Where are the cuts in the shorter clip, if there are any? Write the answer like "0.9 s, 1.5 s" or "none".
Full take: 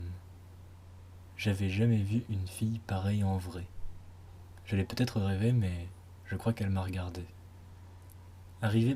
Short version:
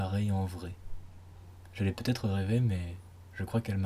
none